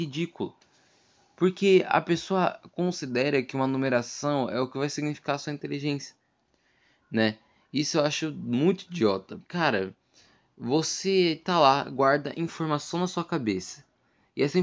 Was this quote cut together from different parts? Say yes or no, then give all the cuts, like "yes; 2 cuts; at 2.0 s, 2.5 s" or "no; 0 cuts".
yes; 1 cut; at 9.4 s